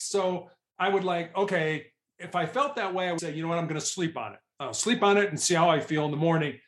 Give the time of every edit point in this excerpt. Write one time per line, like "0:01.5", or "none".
0:03.2